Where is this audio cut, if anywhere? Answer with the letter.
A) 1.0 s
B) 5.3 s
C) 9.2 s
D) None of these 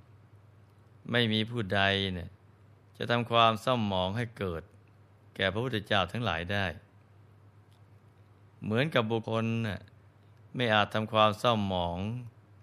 C